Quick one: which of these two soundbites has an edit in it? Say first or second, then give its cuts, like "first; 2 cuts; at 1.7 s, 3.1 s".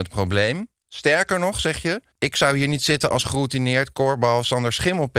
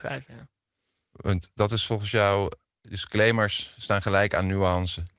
first; 1 cut; at 2.1 s